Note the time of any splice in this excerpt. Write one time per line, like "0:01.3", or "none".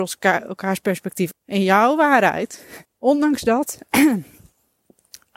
0:01.3
0:02.8